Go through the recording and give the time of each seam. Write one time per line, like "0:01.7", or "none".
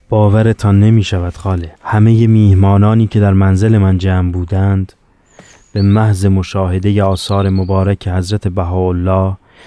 0:01.8